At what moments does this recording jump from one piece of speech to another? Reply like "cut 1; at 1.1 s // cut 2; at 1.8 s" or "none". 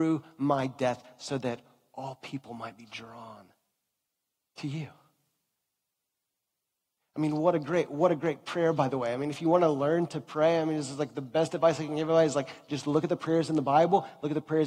none